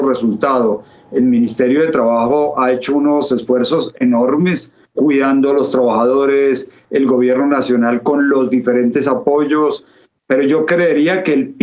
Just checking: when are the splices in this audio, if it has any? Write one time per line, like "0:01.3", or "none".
0:04.9